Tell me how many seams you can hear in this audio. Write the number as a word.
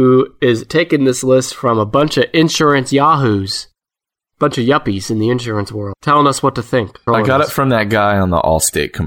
one